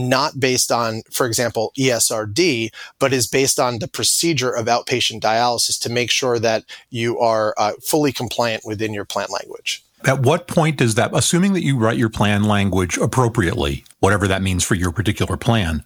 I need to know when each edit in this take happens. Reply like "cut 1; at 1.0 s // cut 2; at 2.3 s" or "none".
cut 1; at 9.9 s // cut 2; at 13.9 s